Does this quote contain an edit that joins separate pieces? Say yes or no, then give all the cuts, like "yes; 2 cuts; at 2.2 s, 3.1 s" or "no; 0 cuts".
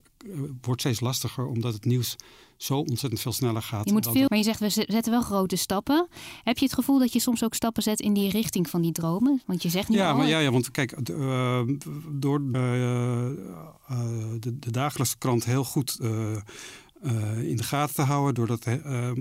yes; 2 cuts; at 4.3 s, 12.5 s